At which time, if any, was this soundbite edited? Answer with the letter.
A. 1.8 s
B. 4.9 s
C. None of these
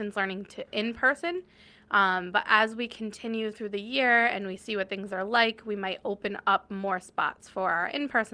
C